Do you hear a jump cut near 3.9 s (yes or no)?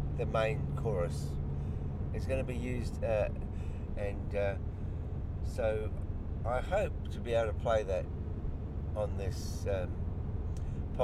yes